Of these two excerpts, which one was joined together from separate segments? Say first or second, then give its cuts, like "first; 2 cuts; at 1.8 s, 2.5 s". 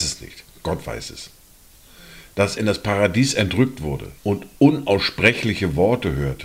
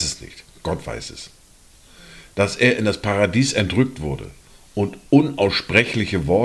first; 2 cuts; at 2.6 s, 4.2 s